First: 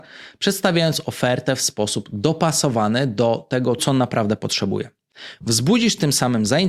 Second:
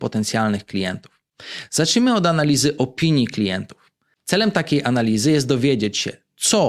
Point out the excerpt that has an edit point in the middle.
first; 1 cut; at 3.8 s

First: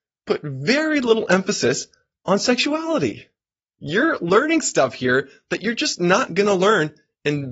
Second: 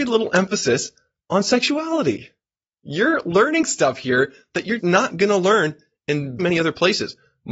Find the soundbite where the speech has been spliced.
second; 2 cuts; at 4.8 s, 6.4 s

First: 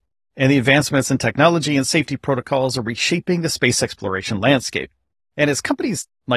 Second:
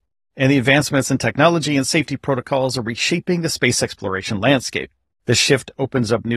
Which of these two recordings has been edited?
second; 1 cut; at 5.2 s

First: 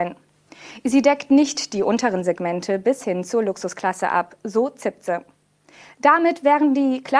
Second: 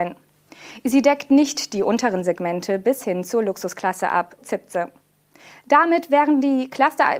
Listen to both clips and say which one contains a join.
second; 1 cut; at 4.4 s

